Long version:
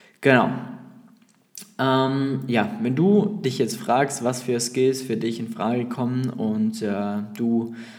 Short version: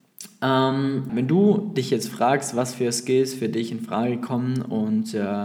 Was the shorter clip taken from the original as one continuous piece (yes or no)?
no